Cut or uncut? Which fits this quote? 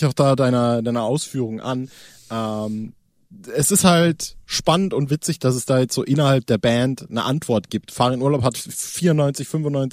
uncut